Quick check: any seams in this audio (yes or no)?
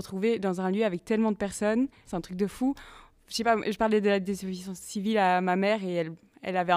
yes